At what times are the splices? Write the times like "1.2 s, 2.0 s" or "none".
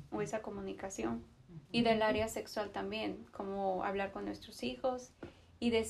1.7 s